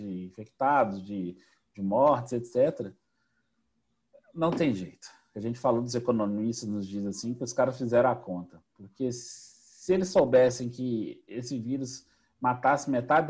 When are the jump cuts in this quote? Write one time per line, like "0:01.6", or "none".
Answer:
none